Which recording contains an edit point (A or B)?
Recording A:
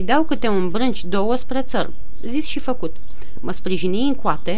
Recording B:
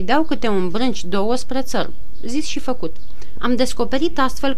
B